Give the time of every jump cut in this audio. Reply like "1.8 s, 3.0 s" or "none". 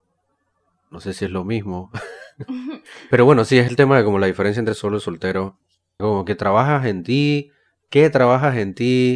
6.0 s